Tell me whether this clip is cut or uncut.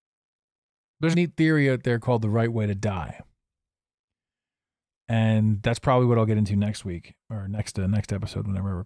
cut